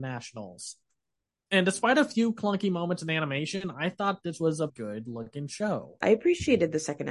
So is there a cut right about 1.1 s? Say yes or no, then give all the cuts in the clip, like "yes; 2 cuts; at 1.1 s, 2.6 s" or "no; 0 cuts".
no; 2 cuts; at 4.7 s, 6.0 s